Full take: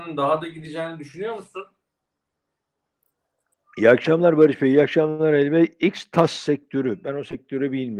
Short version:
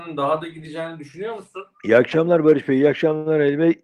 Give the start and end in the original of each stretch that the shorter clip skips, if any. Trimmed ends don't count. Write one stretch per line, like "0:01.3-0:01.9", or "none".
0:01.7-0:03.7